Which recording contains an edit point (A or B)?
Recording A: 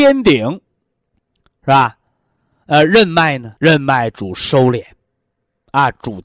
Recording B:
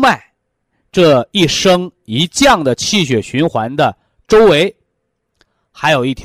A